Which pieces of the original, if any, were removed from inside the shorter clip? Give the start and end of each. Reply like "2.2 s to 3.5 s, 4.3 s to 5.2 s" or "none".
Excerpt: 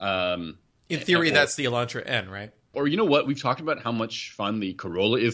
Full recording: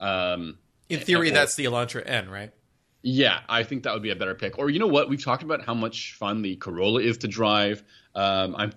2.7 s to 4.6 s